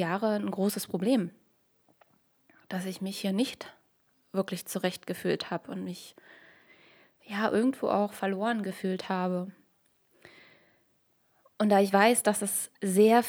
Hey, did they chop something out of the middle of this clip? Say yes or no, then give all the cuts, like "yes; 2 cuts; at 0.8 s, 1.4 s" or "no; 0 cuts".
no; 0 cuts